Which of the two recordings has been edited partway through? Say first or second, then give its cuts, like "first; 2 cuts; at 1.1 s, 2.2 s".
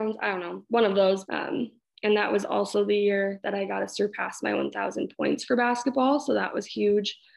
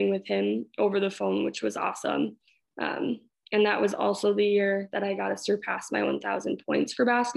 first; 1 cut; at 1.3 s